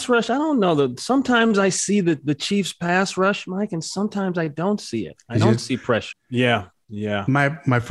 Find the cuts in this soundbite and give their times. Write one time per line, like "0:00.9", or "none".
0:06.1